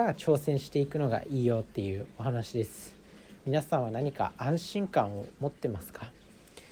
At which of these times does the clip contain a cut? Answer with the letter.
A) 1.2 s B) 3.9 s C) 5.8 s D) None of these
D